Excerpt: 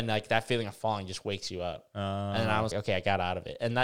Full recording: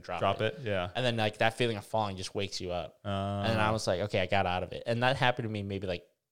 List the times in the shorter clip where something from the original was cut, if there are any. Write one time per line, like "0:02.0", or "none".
0:02.7

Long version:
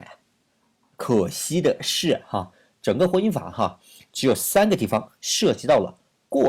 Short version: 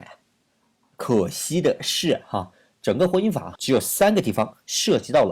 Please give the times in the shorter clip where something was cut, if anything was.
0:03.6

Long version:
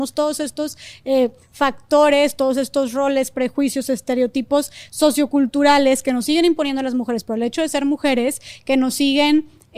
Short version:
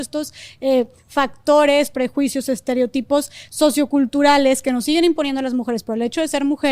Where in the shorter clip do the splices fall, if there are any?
0:01.9

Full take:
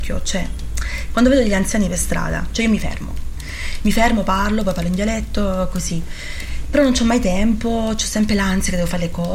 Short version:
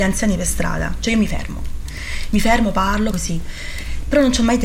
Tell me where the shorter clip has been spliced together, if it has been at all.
0:03.1

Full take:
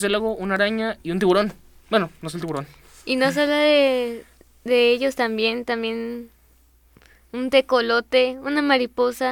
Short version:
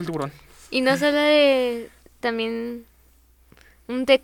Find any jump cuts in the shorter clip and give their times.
0:02.2

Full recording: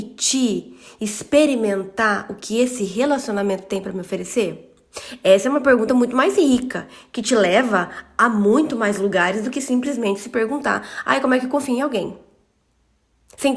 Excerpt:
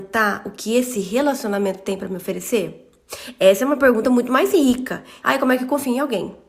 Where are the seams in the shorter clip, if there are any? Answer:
0:05.2

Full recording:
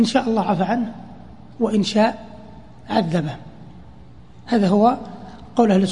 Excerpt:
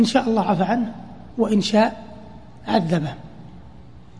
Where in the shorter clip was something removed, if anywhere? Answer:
0:01.3

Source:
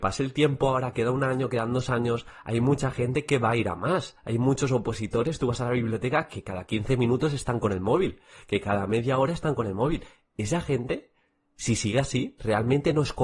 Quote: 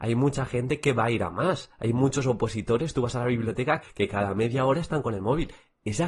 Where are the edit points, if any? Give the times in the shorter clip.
0:03.8

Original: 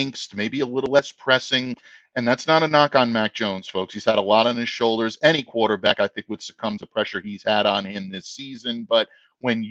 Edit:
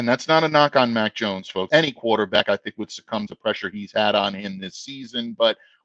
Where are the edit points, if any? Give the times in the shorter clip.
0:01.7

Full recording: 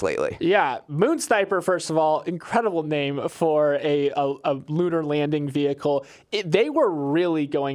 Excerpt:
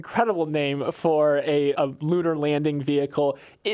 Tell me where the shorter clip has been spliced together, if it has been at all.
0:01.7

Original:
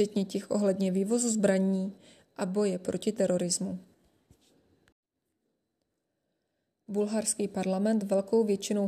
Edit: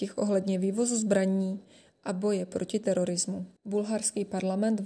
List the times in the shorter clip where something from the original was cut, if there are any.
0:03.6

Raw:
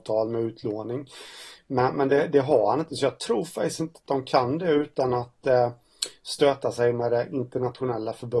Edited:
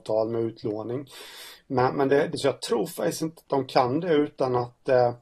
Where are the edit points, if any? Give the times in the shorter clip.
0:02.3

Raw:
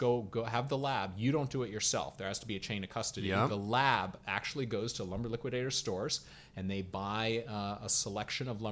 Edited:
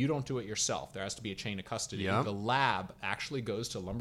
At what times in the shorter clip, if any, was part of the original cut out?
none

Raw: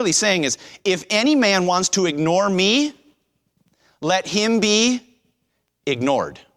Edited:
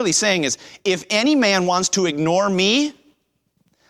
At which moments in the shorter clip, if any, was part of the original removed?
none

